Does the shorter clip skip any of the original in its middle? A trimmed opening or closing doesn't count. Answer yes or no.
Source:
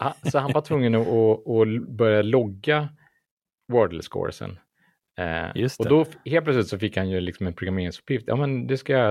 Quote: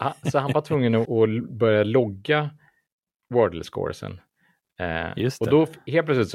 yes